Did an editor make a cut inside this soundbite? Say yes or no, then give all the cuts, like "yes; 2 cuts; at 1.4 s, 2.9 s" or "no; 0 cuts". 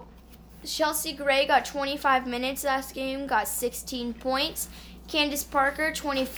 no; 0 cuts